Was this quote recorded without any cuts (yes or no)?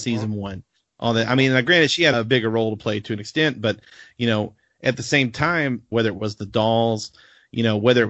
no